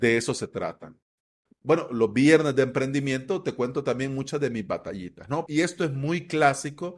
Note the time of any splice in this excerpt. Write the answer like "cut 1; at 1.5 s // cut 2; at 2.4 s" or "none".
cut 1; at 1.5 s // cut 2; at 5.5 s